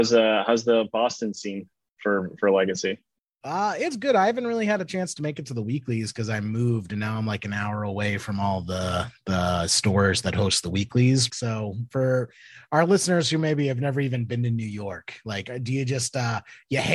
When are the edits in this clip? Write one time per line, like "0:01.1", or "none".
0:11.3